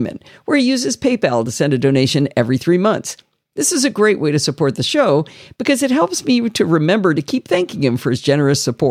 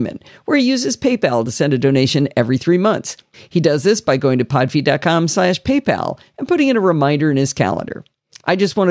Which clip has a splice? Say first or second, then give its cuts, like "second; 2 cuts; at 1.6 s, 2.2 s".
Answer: second; 1 cut; at 3.3 s